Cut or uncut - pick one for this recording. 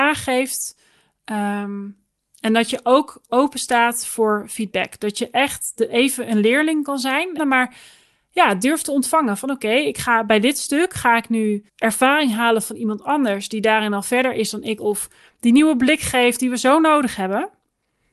cut